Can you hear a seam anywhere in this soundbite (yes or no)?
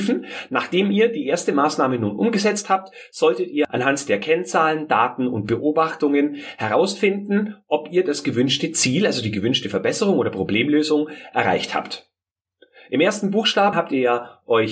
yes